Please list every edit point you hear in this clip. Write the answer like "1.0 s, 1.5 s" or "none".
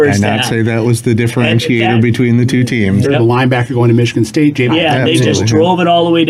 3.0 s, 4.7 s

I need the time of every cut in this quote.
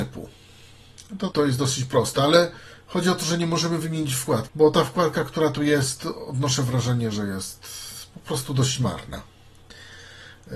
1.3 s, 4.5 s

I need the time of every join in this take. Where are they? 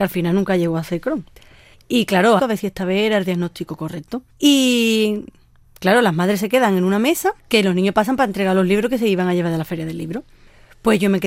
2.4 s, 4.3 s, 7.4 s

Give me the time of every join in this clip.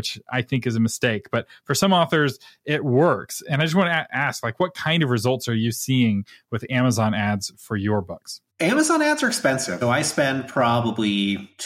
8.5 s, 9.8 s

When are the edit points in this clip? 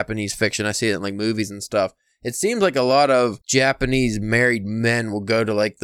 3.4 s

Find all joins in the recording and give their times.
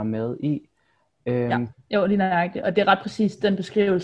1.7 s

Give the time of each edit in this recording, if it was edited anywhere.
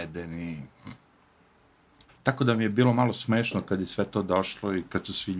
2.1 s

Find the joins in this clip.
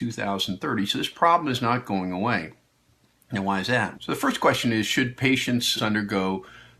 3.9 s, 5.8 s

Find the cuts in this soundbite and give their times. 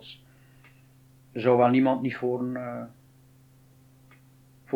none

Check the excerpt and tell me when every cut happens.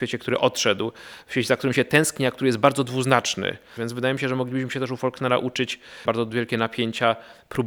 3.8 s, 6.0 s

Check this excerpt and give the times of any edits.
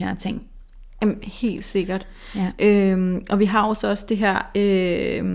none

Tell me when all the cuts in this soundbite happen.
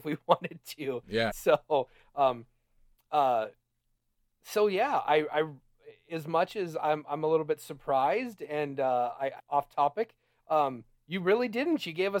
1.3 s, 9.4 s

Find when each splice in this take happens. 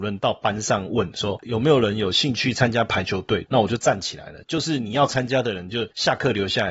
3.5 s

